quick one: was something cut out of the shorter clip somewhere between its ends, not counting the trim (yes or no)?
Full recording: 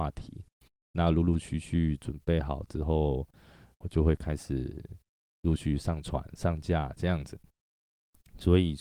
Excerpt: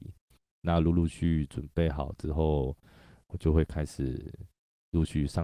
yes